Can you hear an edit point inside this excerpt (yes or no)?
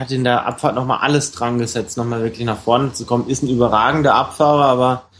no